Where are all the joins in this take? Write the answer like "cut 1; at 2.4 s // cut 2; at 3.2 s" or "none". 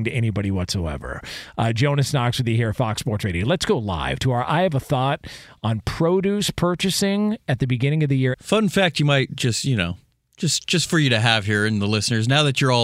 cut 1; at 8.3 s